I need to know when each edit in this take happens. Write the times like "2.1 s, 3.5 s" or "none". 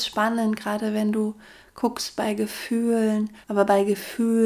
3.4 s